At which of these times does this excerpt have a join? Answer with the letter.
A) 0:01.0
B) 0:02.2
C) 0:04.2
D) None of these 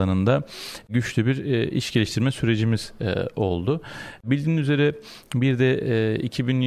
D